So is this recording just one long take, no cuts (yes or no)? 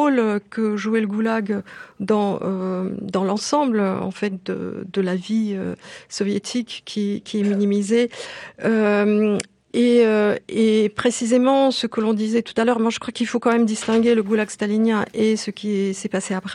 yes